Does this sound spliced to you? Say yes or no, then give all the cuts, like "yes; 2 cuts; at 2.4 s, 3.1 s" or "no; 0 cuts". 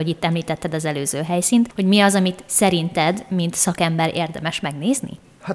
no; 0 cuts